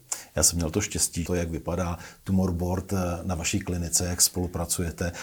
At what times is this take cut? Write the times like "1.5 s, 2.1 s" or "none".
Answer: 1.3 s